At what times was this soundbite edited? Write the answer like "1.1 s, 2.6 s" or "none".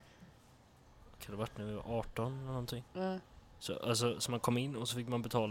2.9 s

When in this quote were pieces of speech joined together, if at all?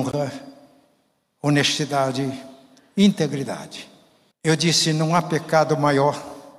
4.3 s

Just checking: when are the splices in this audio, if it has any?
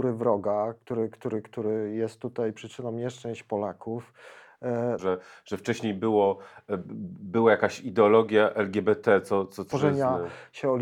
5.0 s, 9.7 s

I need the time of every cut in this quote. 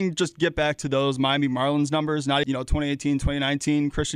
2.4 s

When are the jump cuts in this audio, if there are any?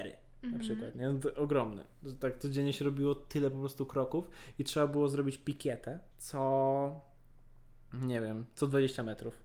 6.1 s

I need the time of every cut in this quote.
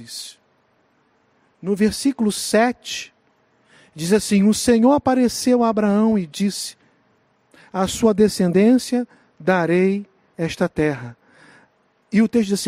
none

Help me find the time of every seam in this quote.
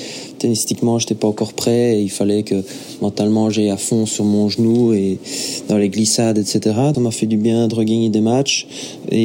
6.9 s

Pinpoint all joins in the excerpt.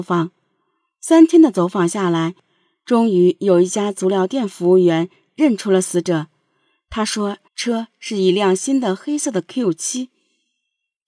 7.5 s

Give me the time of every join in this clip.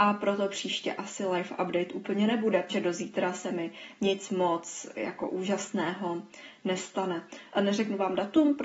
2.7 s, 7.5 s

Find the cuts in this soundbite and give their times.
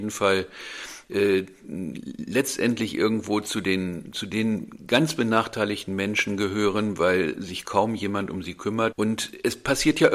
8.9 s

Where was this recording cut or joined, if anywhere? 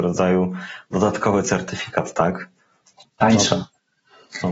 3.0 s

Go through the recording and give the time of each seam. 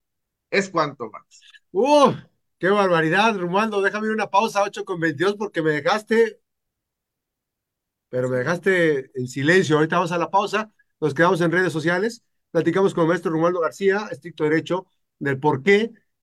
none

